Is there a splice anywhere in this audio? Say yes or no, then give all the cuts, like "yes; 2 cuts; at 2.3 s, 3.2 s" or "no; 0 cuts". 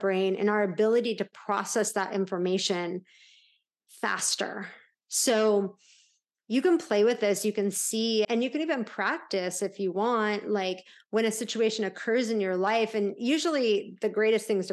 yes; 1 cut; at 8.2 s